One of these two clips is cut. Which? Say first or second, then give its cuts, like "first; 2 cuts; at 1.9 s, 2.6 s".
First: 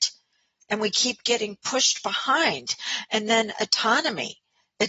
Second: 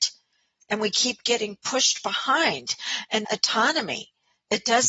second; 1 cut; at 3.2 s